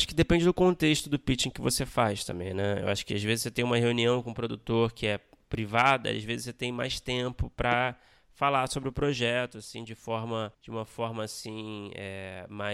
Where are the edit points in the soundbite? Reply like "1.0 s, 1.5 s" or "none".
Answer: 10.5 s